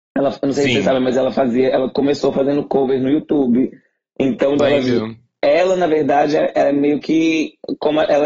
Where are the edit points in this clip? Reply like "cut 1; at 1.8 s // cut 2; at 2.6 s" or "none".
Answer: cut 1; at 4.6 s